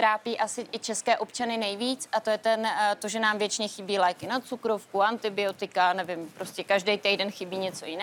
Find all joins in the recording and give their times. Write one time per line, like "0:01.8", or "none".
none

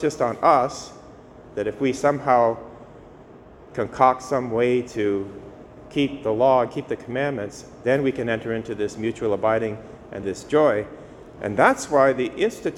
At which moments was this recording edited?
0:10.2
0:11.4

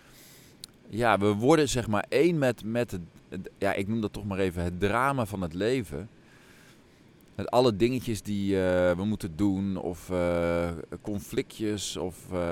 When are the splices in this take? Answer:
none

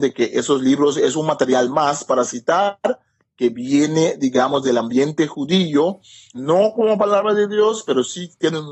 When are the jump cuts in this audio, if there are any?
none

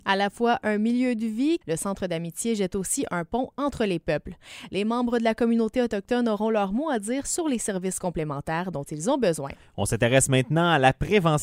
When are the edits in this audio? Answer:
0:01.6

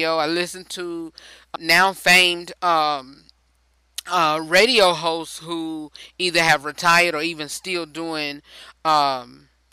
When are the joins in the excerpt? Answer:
0:01.6

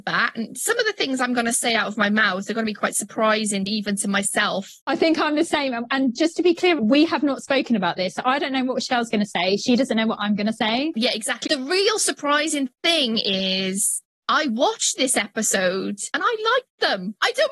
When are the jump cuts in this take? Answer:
0:06.8
0:11.5

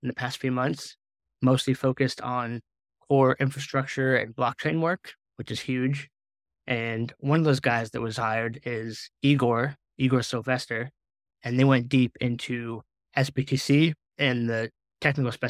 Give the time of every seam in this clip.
0:11.3

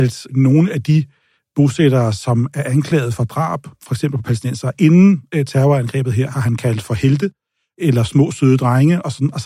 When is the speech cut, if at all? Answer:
none

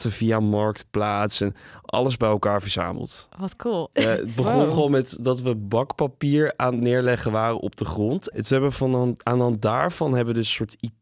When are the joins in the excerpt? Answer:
0:03.9
0:08.3

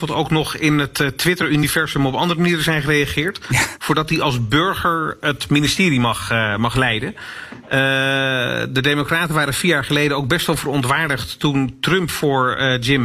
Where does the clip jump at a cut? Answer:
0:03.8

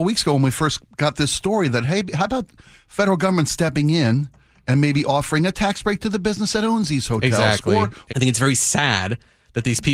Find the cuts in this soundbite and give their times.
0:08.1

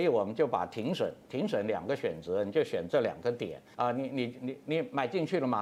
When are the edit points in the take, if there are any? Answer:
0:03.7

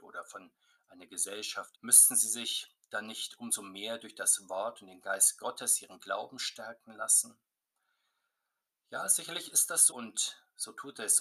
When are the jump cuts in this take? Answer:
0:01.7
0:09.9

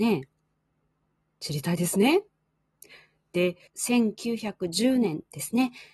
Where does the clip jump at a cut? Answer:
0:03.7

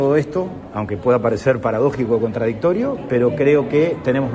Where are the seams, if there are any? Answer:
none

